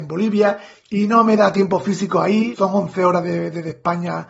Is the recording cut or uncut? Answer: cut